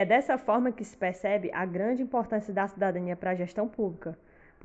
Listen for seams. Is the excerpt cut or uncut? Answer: uncut